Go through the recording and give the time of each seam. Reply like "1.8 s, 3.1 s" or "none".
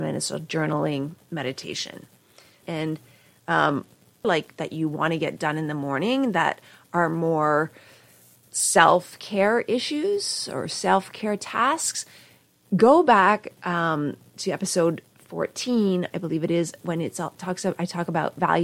2.6 s, 4.2 s